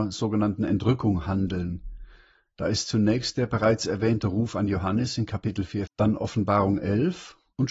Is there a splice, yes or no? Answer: yes